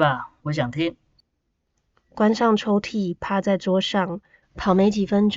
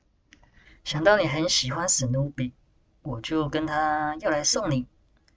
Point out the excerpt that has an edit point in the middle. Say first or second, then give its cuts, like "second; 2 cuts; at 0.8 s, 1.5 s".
first; 1 cut; at 4.4 s